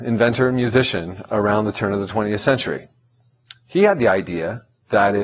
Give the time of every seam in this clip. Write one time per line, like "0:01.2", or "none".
none

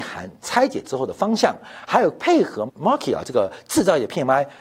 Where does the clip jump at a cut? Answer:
0:02.7

